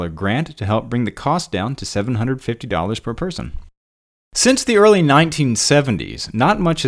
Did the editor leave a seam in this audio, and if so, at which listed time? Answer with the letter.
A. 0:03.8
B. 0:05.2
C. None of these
C